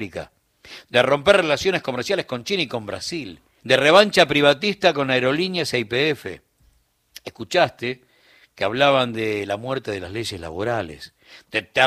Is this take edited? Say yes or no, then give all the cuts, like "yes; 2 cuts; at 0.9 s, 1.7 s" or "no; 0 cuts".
yes; 1 cut; at 3.6 s